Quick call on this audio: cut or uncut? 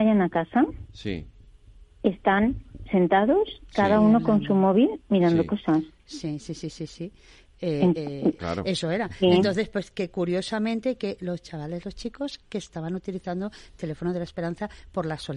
cut